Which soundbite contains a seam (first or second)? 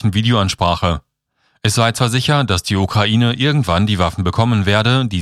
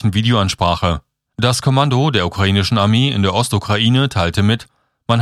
second